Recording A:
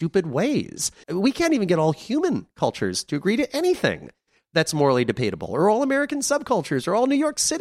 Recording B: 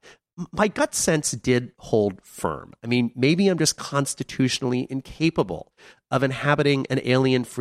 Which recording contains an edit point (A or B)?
A